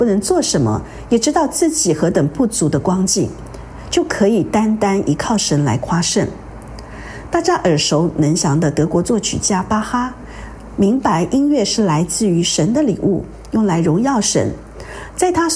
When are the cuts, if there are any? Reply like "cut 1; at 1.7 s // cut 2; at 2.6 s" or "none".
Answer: none